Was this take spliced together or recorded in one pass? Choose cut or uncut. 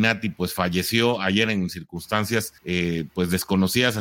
cut